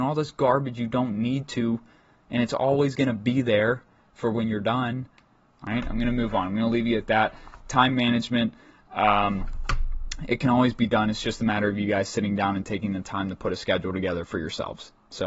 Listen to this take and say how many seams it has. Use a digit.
1